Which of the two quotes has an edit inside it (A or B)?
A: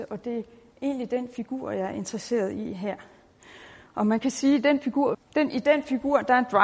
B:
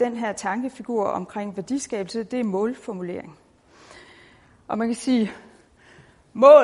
A